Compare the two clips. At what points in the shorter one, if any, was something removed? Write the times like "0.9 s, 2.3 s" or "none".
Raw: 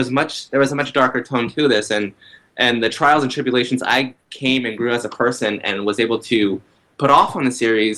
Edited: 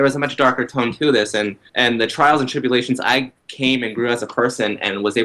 1.7 s